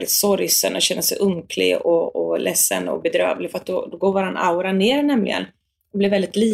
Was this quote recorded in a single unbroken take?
yes; 0 cuts

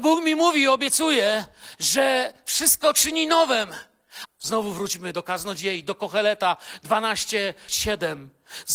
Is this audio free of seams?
no; 2 cuts; at 4.3 s, 7.7 s

